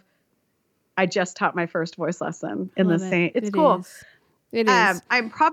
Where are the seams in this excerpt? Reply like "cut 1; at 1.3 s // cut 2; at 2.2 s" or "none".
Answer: cut 1; at 3.3 s